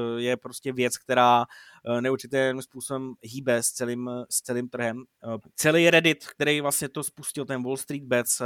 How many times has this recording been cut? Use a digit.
1